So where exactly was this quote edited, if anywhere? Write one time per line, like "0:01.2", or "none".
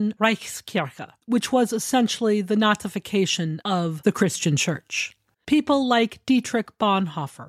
0:05.3